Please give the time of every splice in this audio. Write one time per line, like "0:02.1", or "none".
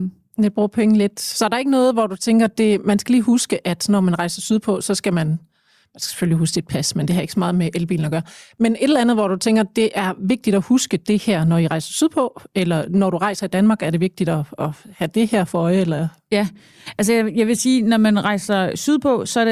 none